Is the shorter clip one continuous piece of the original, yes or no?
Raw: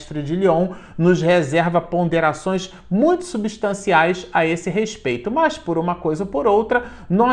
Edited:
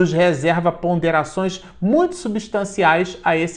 yes